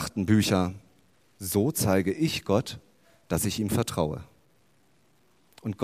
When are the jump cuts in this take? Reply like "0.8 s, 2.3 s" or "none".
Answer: 1.2 s